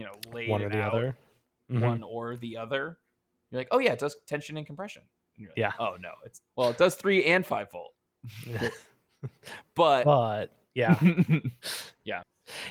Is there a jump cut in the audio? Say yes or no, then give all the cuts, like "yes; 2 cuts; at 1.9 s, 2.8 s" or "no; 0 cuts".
no; 0 cuts